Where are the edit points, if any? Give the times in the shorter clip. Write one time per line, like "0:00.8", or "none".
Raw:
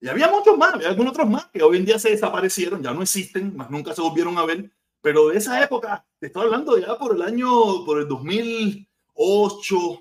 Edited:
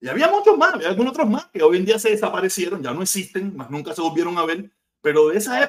none